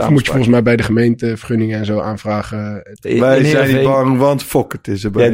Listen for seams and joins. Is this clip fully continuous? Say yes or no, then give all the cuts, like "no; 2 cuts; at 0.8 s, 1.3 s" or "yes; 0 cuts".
no; 1 cut; at 2.9 s